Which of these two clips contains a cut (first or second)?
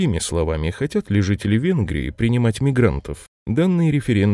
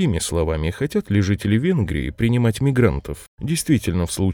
second